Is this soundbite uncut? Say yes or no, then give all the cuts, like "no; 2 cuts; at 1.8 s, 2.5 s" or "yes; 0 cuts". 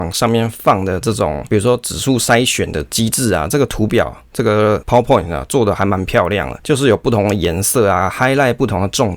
yes; 0 cuts